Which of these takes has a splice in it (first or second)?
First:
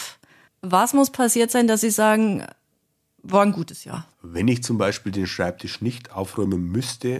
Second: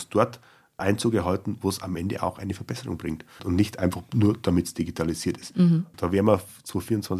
first